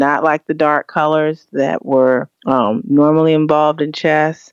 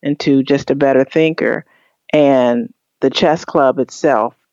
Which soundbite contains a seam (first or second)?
first